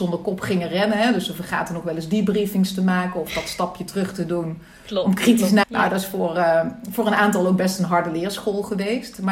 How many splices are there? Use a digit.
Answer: 1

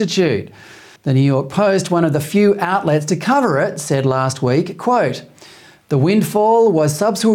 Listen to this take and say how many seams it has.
1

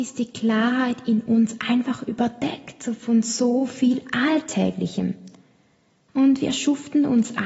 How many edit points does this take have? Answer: 1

